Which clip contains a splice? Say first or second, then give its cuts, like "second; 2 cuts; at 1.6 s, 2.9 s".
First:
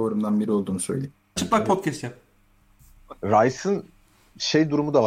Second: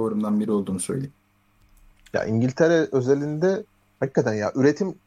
first; 1 cut; at 1.4 s